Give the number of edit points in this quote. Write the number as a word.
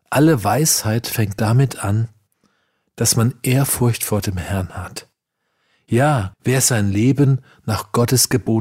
one